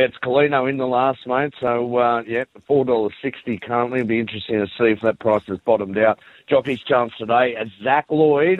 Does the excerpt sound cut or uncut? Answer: uncut